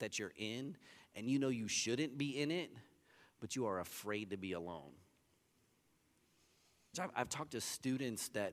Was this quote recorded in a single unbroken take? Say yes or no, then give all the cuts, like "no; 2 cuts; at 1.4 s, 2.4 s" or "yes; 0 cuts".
no; 1 cut; at 6.9 s